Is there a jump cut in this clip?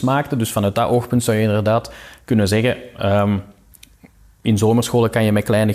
no; 0 cuts

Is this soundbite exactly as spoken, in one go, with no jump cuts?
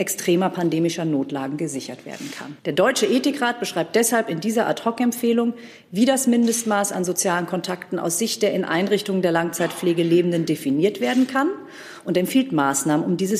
no; 1 cut; at 2.6 s

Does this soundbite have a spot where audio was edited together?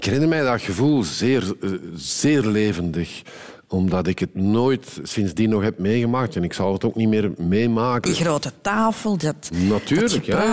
yes; 1 cut; at 8.1 s

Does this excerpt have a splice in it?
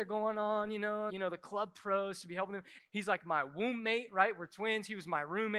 yes; 2 cuts; at 1.1 s, 2.8 s

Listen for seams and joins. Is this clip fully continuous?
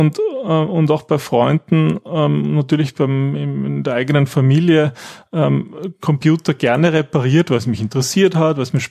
yes; 0 cuts

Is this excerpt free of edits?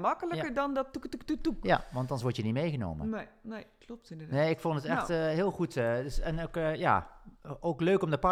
yes; 0 cuts

